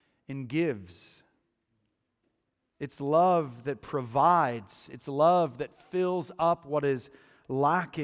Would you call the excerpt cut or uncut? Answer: uncut